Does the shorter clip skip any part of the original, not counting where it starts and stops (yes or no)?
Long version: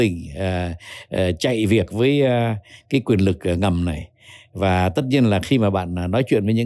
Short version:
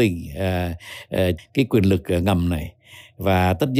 yes